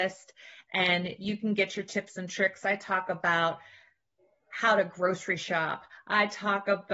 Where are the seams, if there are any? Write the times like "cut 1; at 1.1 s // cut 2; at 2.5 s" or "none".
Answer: none